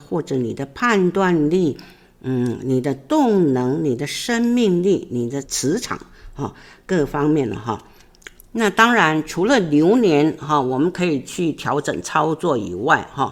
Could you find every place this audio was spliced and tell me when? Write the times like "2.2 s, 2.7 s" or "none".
5.4 s, 8.4 s